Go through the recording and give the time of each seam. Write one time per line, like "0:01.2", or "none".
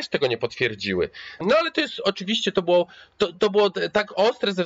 0:01.4